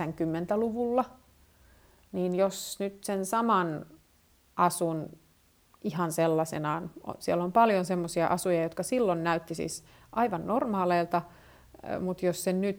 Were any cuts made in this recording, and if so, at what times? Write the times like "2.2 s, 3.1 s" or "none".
none